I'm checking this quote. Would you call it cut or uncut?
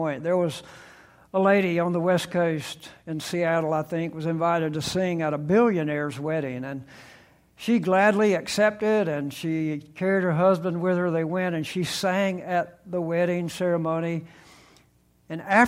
uncut